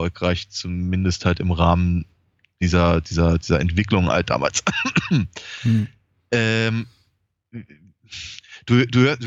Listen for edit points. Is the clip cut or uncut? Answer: uncut